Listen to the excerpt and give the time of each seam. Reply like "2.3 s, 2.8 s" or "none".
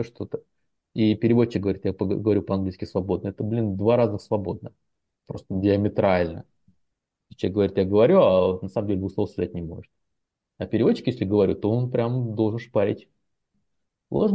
none